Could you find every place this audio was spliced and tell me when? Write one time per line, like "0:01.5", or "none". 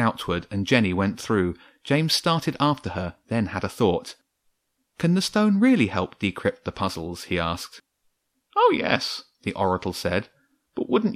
none